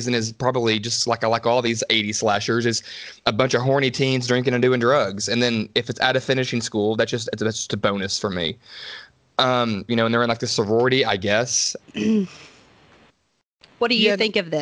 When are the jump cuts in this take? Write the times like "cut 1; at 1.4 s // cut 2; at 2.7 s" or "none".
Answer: cut 1; at 9.9 s // cut 2; at 11.8 s